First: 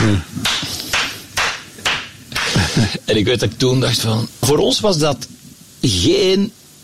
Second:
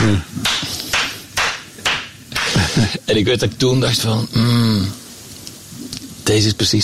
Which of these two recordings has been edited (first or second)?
first